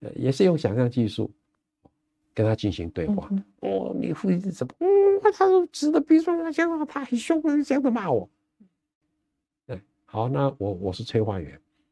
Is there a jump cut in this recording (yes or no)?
no